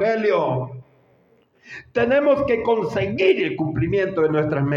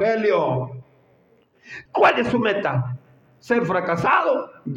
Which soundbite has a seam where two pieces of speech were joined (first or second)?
second